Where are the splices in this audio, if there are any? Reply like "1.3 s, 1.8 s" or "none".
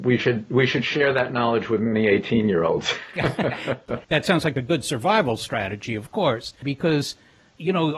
4.0 s, 6.6 s